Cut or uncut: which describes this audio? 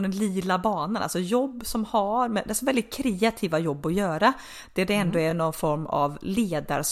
uncut